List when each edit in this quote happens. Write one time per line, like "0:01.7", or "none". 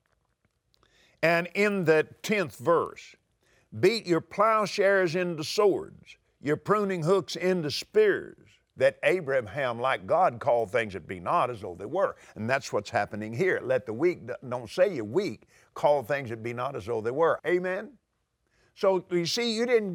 0:08.7
0:17.4